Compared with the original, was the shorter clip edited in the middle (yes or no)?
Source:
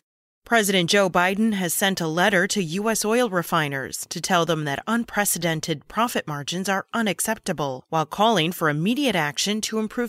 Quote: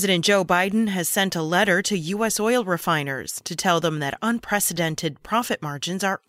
no